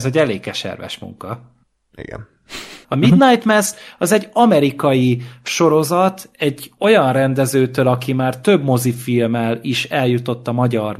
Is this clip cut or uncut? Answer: cut